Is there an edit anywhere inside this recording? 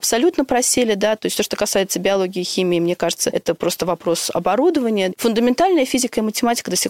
no; 0 cuts

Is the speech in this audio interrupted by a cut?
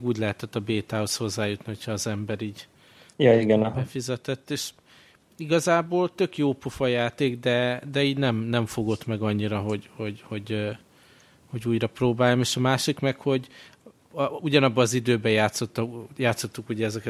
no; 0 cuts

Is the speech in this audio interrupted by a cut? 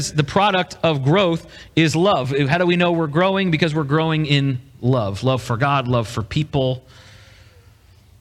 no; 0 cuts

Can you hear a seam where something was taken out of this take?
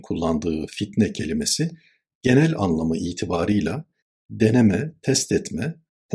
no; 0 cuts

